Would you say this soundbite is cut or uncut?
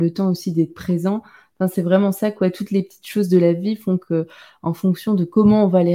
uncut